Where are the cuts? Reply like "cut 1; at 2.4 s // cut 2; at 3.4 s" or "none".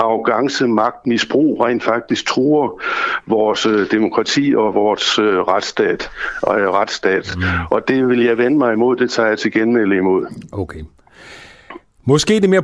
none